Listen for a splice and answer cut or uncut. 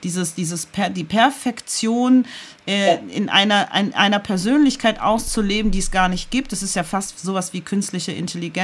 uncut